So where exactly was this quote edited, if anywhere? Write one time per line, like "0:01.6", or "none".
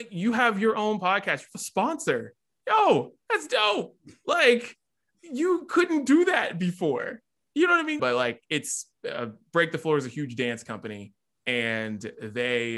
0:08.0